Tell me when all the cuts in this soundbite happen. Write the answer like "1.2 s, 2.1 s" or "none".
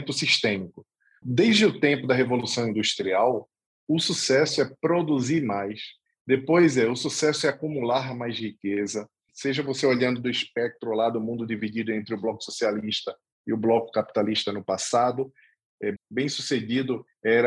1.2 s, 9.3 s, 16.0 s